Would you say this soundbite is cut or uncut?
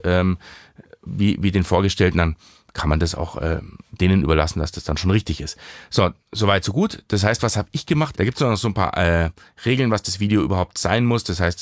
cut